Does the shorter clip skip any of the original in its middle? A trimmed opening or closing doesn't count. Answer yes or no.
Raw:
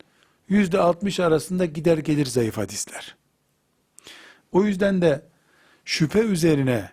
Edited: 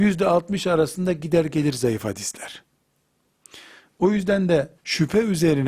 yes